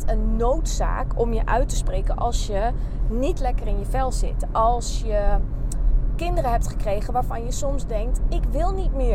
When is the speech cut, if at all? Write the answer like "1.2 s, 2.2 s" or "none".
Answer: none